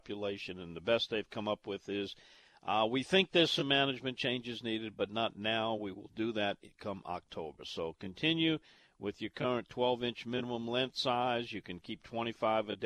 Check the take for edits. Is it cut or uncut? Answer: uncut